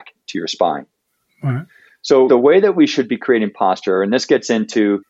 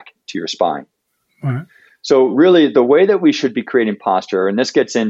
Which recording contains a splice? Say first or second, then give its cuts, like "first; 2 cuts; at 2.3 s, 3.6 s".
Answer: first; 1 cut; at 2.3 s